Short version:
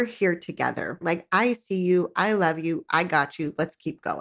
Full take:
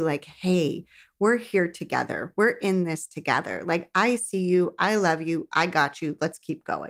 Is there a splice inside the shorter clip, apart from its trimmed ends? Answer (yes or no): yes